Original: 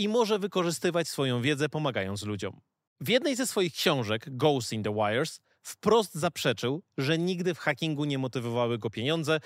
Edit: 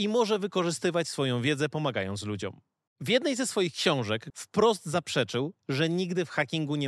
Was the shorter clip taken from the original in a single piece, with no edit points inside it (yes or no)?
no